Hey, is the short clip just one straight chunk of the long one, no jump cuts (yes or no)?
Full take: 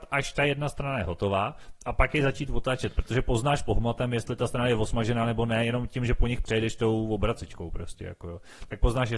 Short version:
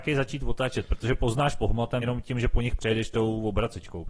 no